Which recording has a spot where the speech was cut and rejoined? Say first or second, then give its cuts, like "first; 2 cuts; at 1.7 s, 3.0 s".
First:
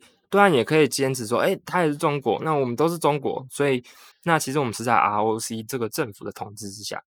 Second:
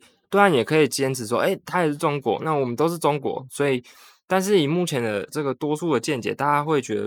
first; 1 cut; at 4.1 s